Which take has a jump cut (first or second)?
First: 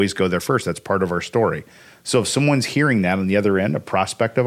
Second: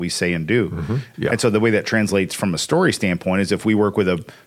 second